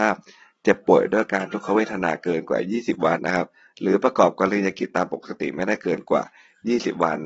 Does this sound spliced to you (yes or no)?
yes